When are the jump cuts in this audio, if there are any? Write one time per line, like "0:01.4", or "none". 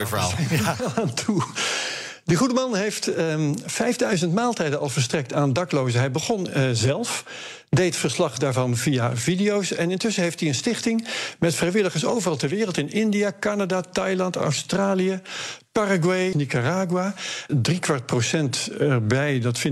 0:16.3
0:17.5